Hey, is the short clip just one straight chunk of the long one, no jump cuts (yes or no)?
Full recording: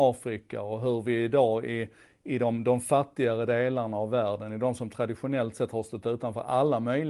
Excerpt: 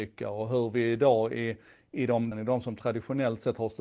no